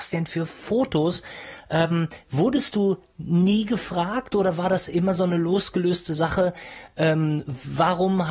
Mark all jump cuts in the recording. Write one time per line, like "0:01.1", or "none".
none